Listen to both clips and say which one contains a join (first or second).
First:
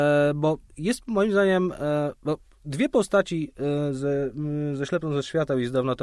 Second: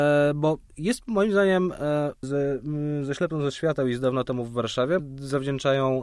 second